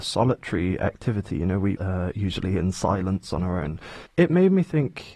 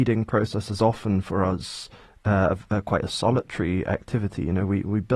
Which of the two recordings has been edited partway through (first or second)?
first